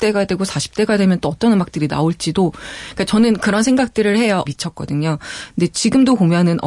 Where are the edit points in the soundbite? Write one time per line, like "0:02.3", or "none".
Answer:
0:04.5